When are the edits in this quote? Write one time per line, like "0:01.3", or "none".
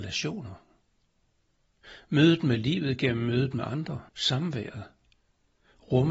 0:04.1